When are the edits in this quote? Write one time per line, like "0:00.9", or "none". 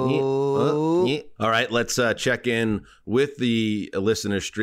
0:01.4